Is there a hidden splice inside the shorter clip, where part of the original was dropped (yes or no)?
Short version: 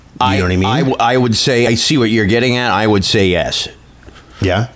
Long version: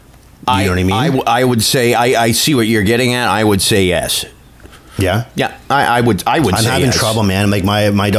yes